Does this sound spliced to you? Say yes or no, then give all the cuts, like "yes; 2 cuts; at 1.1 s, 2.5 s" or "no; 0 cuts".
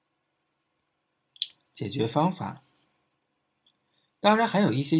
no; 0 cuts